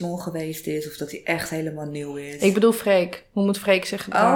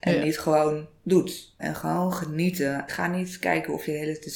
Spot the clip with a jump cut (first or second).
second